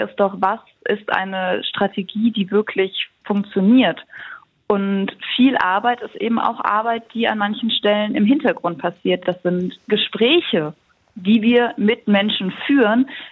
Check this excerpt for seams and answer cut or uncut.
uncut